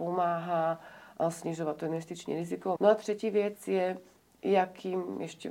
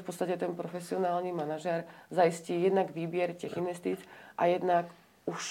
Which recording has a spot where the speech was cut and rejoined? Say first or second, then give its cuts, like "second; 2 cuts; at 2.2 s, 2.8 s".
first; 1 cut; at 2.8 s